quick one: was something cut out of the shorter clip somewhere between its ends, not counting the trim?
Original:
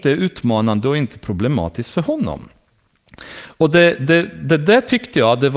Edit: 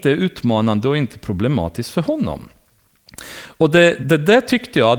yes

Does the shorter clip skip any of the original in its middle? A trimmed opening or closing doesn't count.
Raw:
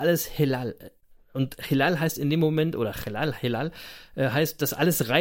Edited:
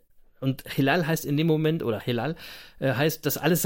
yes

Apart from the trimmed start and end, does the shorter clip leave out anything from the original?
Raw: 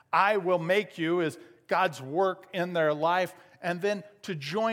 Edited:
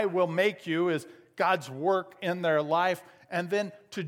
no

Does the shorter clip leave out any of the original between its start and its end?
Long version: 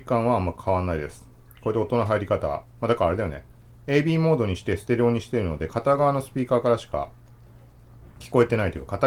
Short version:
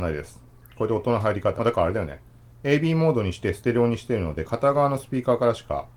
yes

